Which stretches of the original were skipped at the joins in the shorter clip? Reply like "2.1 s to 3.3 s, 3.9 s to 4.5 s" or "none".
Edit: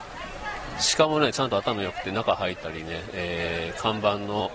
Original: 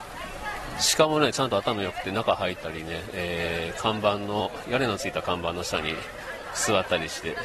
none